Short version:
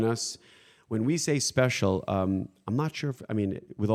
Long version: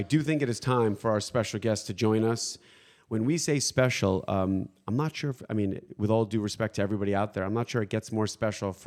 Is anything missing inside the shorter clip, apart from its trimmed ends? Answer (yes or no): no